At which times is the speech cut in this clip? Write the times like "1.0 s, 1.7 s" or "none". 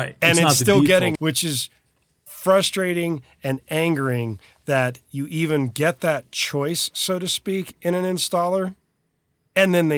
1.2 s